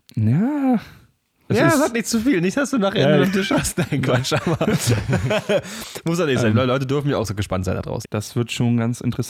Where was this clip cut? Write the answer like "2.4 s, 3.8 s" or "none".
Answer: 3.2 s, 8.0 s